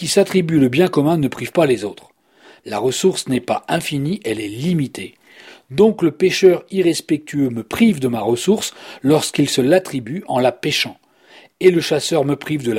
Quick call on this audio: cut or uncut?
cut